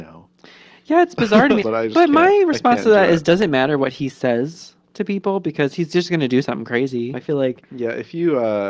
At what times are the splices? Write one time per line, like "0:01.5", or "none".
0:01.6
0:07.1